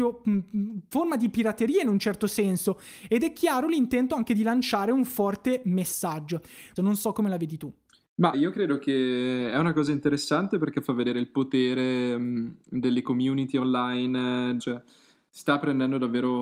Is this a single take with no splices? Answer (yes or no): no